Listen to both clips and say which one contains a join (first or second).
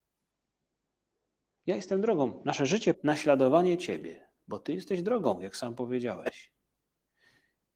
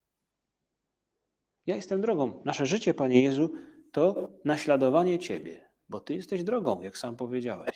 first